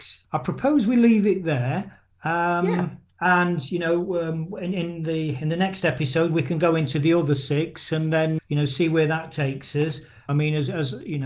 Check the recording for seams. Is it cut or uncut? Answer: cut